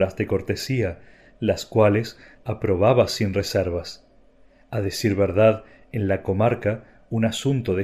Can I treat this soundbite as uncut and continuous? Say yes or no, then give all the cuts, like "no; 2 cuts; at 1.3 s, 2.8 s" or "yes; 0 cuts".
no; 1 cut; at 2.3 s